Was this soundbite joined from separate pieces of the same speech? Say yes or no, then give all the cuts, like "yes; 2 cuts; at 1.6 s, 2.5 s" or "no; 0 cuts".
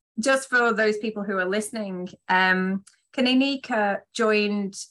no; 0 cuts